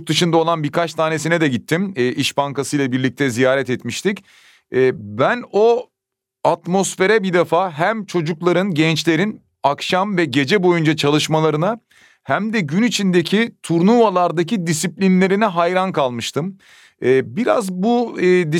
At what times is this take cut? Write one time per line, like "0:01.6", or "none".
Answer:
none

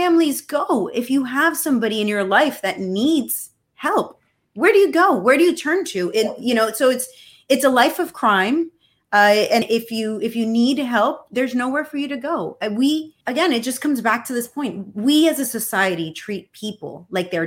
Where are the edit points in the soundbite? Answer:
0:09.6
0:13.2

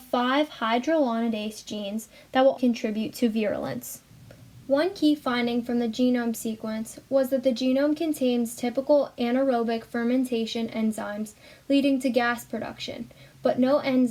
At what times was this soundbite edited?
0:02.6
0:04.6

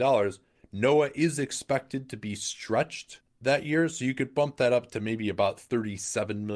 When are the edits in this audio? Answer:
none

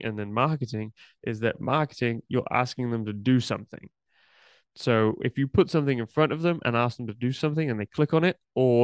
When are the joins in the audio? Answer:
0:04.6

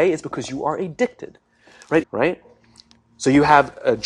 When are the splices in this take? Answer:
0:02.0

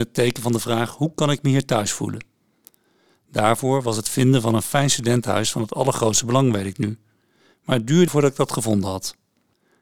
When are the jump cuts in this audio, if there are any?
0:08.1

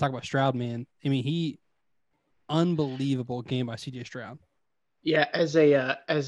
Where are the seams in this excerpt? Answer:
none

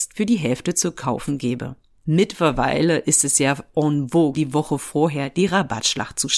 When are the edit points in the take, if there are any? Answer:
0:02.1
0:04.3

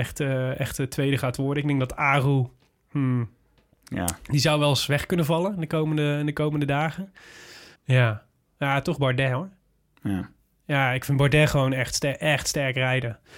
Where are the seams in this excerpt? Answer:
0:07.8

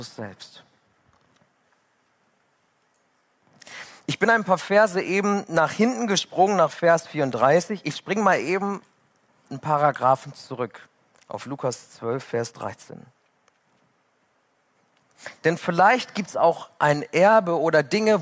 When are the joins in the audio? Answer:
none

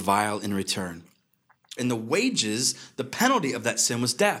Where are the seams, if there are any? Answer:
0:01.8

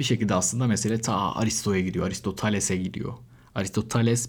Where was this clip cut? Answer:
none

